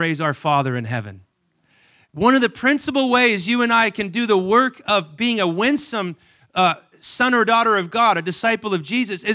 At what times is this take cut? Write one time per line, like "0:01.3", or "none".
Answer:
none

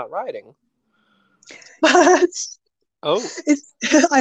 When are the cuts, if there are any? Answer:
0:01.8

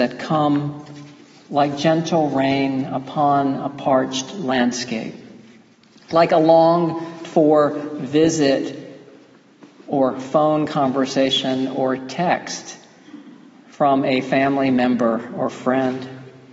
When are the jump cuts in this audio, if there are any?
none

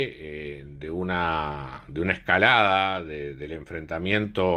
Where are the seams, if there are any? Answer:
none

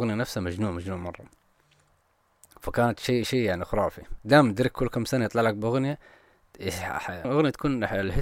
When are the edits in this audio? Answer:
0:07.2

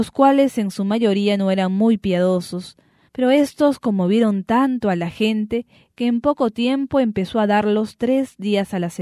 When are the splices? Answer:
0:03.0

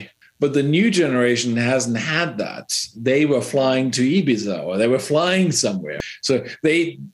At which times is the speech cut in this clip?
none

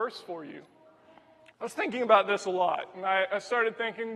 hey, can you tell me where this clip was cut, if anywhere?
0:01.5

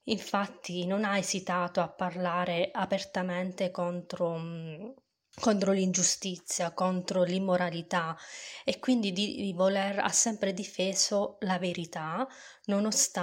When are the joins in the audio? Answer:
none

